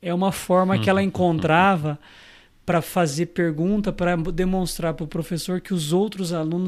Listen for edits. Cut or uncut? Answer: uncut